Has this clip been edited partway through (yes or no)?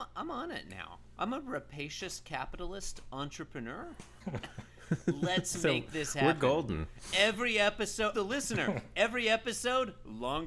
yes